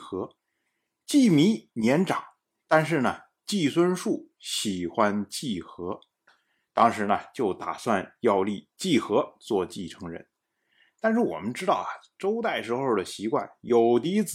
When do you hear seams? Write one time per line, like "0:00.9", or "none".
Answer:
none